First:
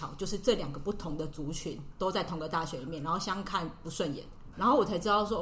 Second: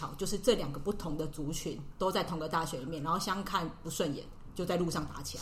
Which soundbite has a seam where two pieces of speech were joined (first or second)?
first